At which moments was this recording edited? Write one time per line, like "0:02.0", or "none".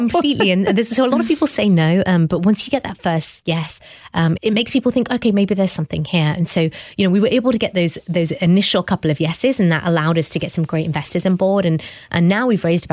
0:04.4